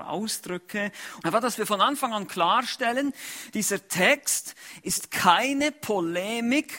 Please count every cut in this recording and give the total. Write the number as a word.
one